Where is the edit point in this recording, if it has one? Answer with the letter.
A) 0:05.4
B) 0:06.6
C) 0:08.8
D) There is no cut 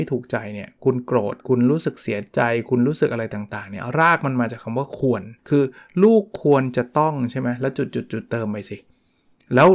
A